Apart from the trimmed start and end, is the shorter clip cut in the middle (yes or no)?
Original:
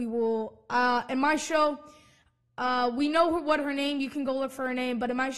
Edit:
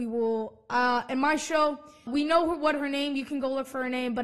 yes